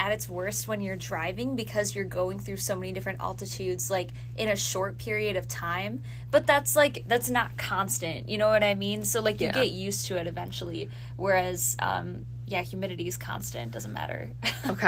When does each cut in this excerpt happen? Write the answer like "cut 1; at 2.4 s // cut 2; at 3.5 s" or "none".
none